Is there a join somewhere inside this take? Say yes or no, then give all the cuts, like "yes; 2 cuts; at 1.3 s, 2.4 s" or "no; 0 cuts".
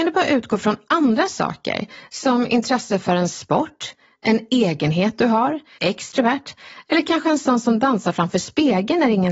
yes; 1 cut; at 5.8 s